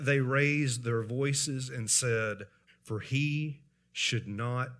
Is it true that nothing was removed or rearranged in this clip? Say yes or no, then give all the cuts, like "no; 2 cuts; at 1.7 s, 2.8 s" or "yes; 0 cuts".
no; 1 cut; at 2.7 s